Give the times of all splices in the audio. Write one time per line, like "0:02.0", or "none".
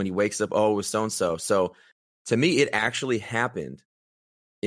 none